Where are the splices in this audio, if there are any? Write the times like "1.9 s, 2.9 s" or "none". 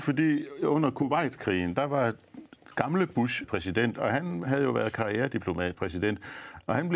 3.4 s, 5.7 s